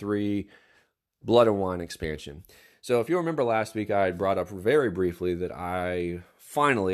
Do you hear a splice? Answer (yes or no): no